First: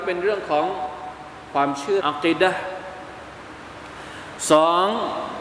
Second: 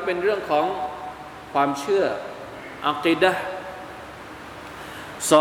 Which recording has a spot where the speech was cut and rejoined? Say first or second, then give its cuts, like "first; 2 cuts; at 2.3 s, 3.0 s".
first; 1 cut; at 2.0 s